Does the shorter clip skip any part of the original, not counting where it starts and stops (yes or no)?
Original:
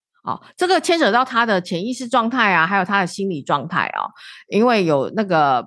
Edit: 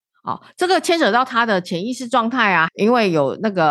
yes